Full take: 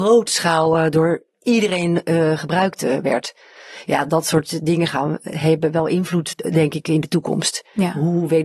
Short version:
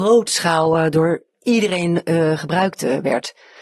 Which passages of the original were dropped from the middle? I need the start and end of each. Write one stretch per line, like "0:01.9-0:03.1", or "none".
none